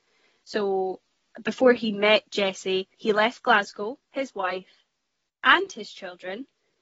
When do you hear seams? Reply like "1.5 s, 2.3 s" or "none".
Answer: 2.9 s, 4.0 s